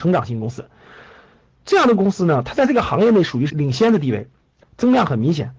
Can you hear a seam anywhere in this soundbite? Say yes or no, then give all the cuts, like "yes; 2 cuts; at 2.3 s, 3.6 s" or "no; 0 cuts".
yes; 2 cuts; at 3.5 s, 4.6 s